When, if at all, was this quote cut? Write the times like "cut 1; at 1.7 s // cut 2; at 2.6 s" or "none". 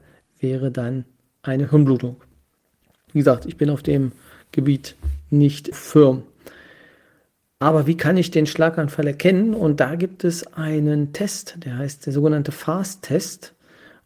cut 1; at 5.7 s

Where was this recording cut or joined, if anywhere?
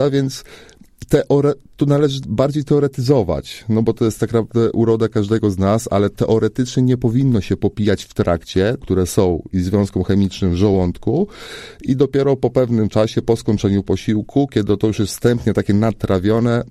cut 1; at 8.8 s

